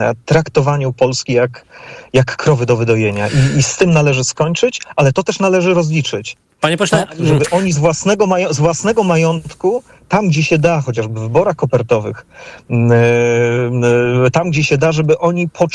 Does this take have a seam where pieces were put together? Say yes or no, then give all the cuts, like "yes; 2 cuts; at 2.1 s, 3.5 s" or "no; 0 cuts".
no; 0 cuts